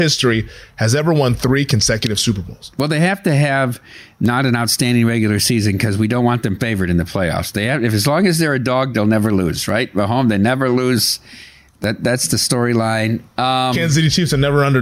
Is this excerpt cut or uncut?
uncut